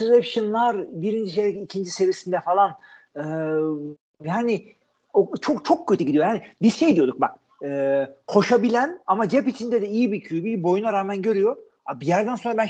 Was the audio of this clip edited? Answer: yes; 1 cut; at 7.5 s

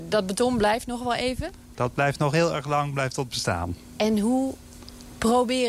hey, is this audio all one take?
no; 1 cut; at 1.7 s

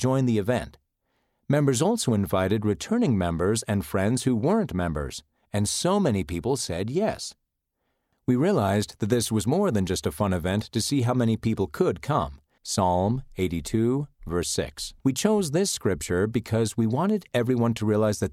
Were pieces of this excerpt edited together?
yes; 2 cuts; at 12.6 s, 15.0 s

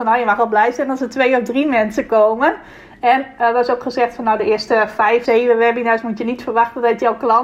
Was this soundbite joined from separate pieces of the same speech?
yes; 1 cut; at 5.3 s

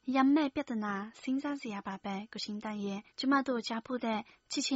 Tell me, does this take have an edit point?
yes; 1 cut; at 3.1 s

